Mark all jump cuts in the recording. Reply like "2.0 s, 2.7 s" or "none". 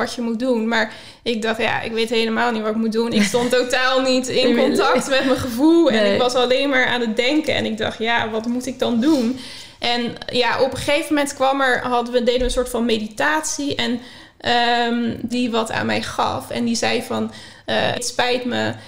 15.3 s, 17.9 s